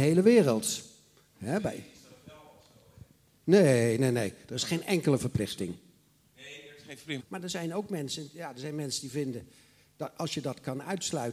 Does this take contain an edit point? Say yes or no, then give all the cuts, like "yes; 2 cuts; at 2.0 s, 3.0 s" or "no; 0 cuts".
yes; 1 cut; at 7.2 s